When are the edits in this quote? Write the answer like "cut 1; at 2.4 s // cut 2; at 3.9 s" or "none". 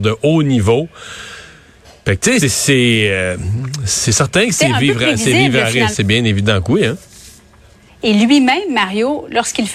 cut 1; at 2.4 s // cut 2; at 5.9 s // cut 3; at 7.9 s

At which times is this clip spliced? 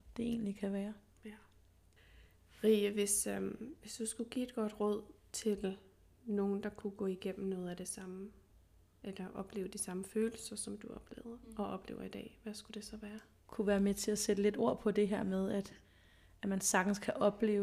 cut 1; at 13.4 s

